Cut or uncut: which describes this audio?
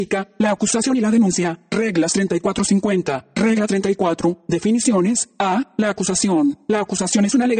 uncut